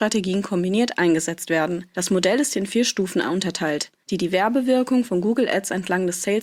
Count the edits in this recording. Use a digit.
2